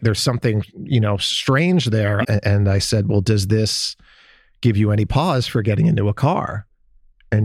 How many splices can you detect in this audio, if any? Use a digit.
1